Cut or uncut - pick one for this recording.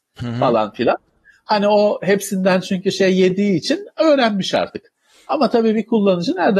uncut